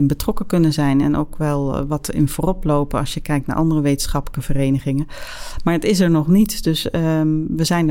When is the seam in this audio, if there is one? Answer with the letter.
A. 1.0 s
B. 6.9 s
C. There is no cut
A